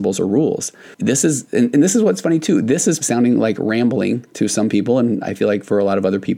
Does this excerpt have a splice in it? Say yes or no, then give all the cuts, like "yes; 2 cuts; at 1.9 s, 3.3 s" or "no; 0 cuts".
yes; 1 cut; at 3.0 s